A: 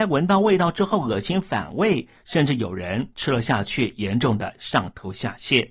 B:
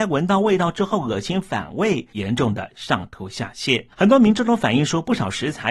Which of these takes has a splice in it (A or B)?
B